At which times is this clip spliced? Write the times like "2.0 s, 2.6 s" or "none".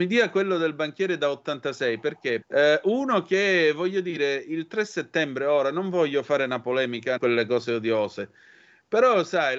2.4 s, 7.2 s